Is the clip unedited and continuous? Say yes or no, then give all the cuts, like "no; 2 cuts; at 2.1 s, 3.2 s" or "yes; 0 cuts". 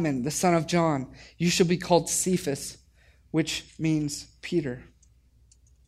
yes; 0 cuts